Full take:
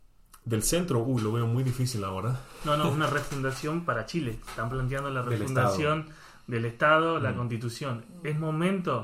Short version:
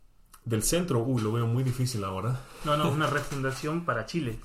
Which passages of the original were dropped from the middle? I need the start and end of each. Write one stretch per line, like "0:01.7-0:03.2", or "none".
none